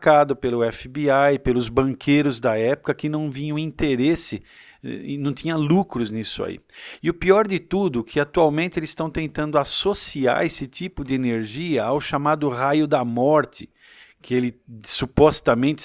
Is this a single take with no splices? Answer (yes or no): yes